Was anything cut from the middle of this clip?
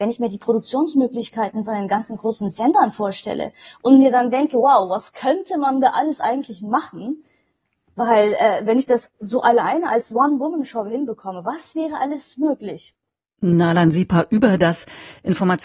no; 0 cuts

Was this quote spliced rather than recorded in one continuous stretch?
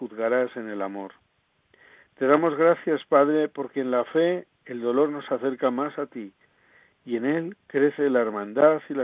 no; 0 cuts

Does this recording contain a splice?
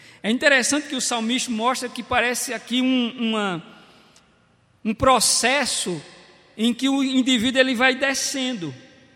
no; 0 cuts

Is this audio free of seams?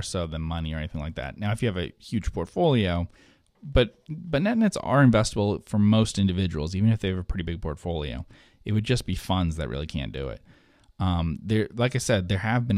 yes; 0 cuts

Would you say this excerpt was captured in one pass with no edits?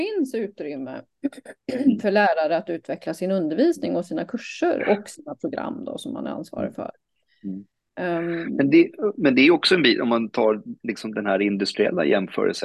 yes; 0 cuts

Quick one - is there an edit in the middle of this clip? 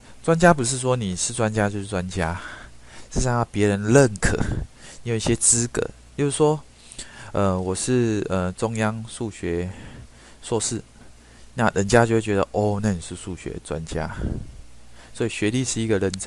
no; 0 cuts

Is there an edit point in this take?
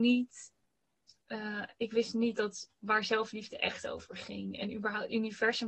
no; 0 cuts

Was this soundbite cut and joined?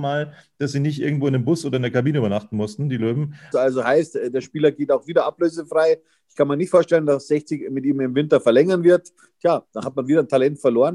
yes; 1 cut; at 3.5 s

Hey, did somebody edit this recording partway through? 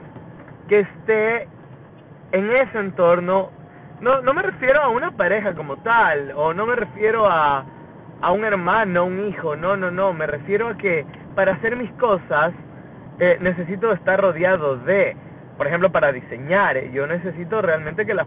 no; 0 cuts

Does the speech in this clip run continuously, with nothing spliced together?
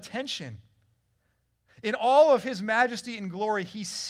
yes; 0 cuts

